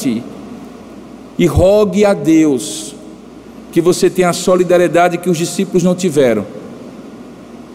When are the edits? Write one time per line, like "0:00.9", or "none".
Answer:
0:01.4

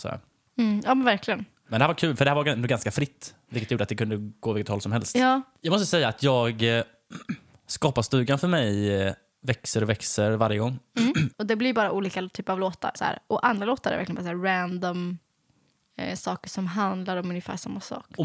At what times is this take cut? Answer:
0:11.3
0:13.0

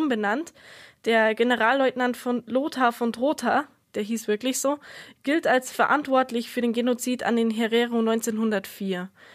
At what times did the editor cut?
none

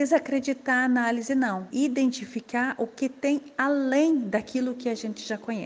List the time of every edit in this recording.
0:01.7

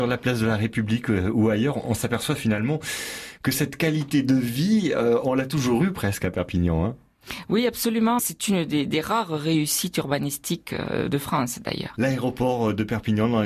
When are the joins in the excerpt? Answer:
0:08.2

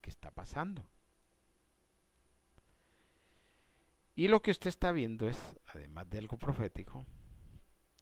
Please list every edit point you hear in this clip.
none

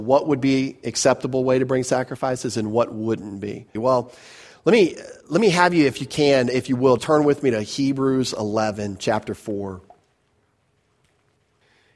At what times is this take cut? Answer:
0:03.8
0:07.0

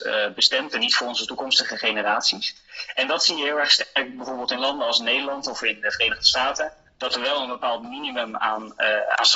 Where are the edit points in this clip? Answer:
none

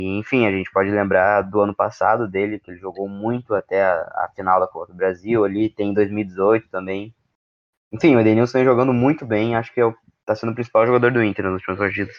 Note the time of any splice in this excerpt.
none

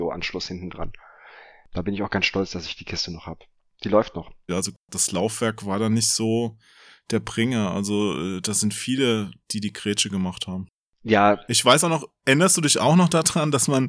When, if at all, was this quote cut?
0:04.5

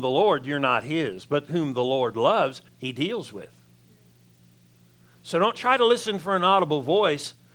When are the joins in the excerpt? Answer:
0:02.7

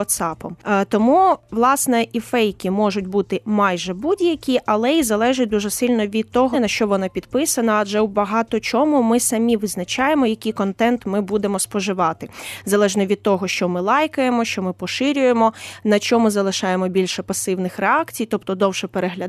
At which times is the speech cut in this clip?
0:06.5

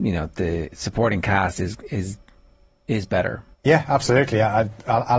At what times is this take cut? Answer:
0:03.5

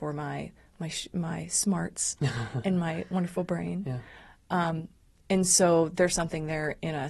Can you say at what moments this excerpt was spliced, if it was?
none

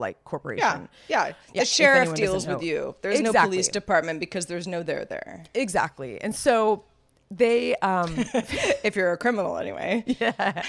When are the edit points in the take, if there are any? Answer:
none

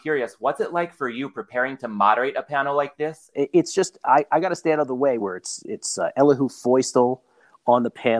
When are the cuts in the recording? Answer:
0:03.3
0:05.2

